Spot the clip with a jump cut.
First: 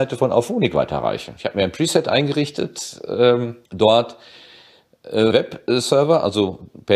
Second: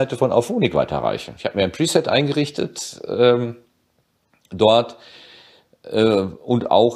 first; 2 cuts; at 3.6 s, 5.3 s

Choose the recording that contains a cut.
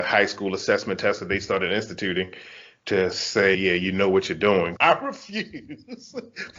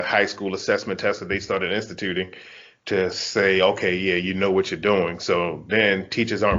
first; 2 cuts; at 3.5 s, 4.8 s

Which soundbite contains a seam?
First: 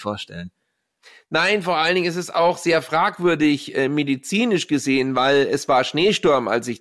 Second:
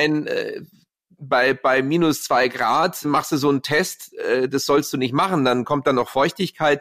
second; 1 cut; at 3.0 s

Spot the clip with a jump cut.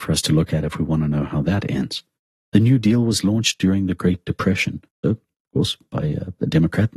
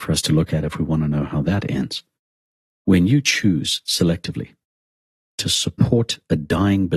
first; 2 cuts; at 2.4 s, 5.0 s

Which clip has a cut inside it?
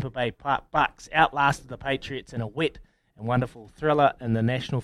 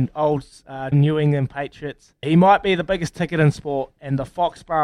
second; 2 cuts; at 0.9 s, 2.2 s

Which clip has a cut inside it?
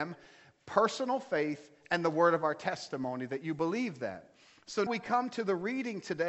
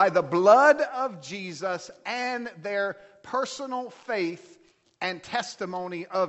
first; 1 cut; at 4.9 s

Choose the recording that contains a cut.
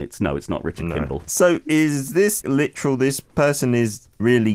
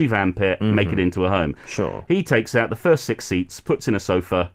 first; 2 cuts; at 1.2 s, 2.4 s

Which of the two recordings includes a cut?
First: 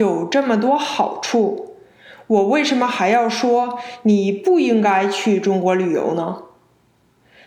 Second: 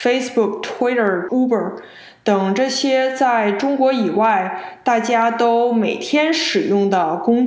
second; 1 cut; at 1.3 s

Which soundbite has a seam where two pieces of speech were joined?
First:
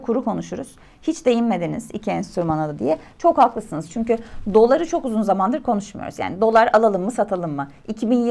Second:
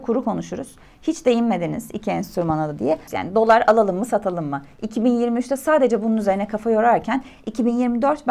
second; 1 cut; at 3.1 s

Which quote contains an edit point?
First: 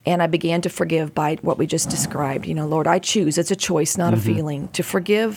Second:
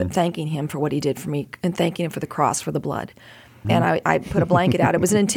second; 1 cut; at 3.6 s

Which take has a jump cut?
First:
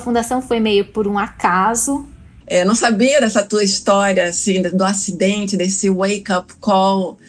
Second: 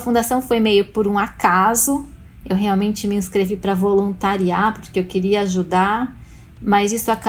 first; 1 cut; at 2.4 s

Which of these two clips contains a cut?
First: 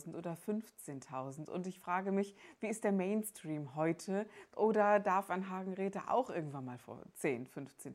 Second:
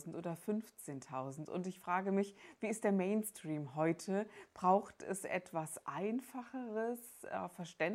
first; 1 cut; at 4.5 s

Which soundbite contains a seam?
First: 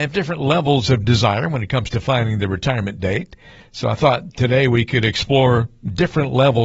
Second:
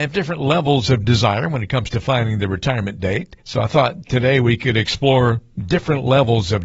second; 1 cut; at 3.4 s

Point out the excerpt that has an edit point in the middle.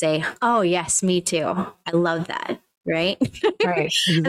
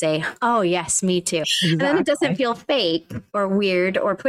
second; 1 cut; at 1.4 s

